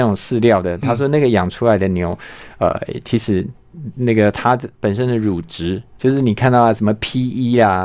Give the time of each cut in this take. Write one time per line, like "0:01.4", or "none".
0:06.0